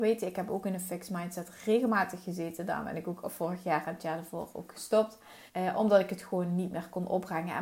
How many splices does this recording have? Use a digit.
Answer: 1